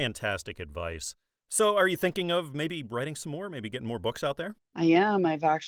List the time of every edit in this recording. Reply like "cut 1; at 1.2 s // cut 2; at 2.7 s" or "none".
none